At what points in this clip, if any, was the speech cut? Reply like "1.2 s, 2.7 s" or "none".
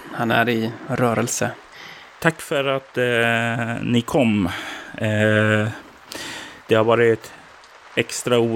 2.2 s, 6.6 s